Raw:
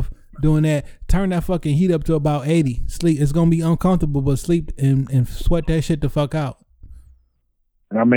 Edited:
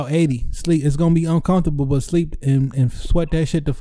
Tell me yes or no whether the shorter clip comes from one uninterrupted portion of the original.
yes